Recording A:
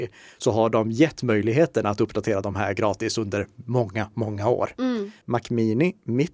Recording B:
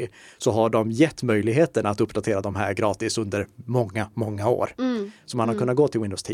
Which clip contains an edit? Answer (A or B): A